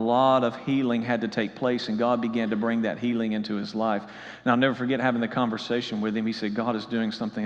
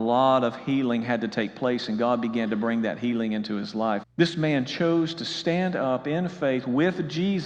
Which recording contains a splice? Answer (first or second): second